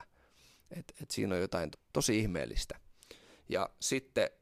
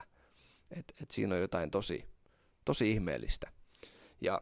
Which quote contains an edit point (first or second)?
first